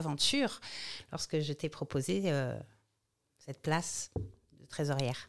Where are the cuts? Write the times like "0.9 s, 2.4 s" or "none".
none